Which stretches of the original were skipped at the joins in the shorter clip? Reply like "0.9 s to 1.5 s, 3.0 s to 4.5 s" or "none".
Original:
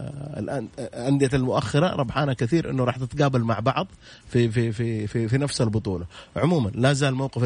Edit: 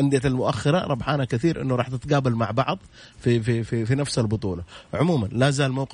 4.7 s to 5.1 s